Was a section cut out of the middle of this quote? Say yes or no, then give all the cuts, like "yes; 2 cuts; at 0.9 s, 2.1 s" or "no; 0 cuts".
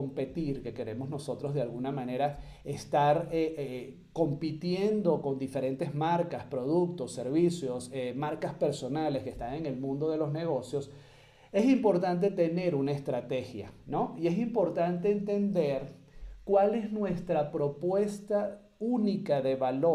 no; 0 cuts